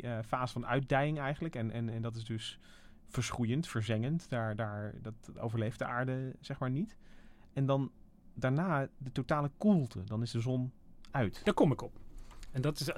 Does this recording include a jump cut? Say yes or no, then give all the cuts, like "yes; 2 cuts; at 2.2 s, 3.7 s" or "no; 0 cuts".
no; 0 cuts